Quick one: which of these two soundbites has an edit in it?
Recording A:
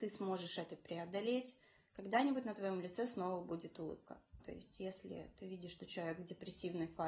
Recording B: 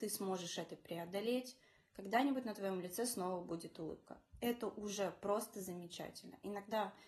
A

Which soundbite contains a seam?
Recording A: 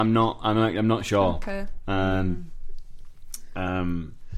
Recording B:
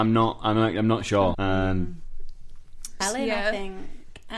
B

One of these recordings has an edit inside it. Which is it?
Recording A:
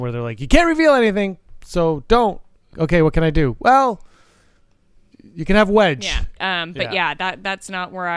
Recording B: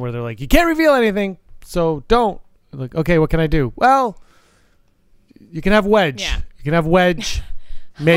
A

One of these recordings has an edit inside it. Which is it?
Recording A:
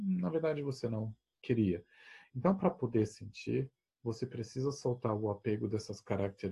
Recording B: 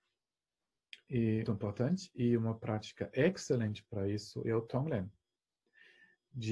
B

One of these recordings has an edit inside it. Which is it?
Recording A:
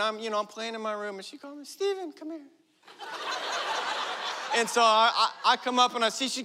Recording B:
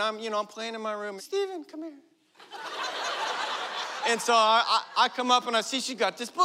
B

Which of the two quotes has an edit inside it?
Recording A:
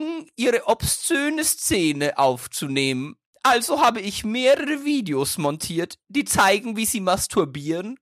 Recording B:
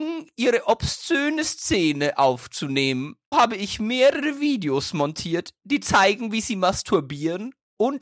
B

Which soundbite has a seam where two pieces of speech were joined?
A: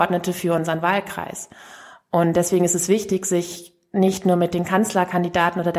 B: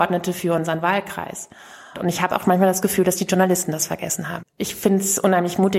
B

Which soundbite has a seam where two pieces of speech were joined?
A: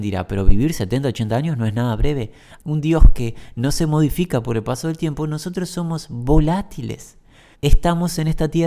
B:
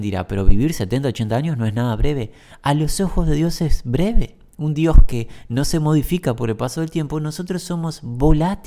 A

